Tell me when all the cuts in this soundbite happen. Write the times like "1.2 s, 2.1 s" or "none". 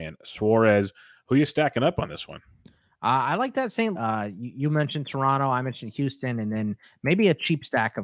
3.9 s